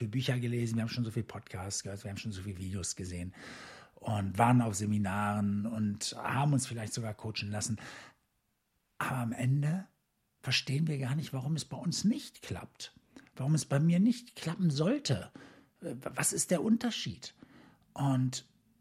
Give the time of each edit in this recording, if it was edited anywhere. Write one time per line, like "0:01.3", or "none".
none